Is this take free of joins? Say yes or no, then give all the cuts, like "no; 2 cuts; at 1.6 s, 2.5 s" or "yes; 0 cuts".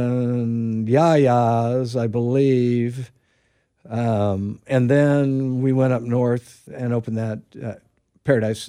no; 1 cut; at 6.7 s